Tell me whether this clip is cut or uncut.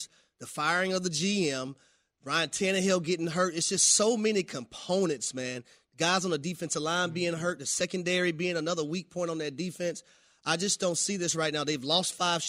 uncut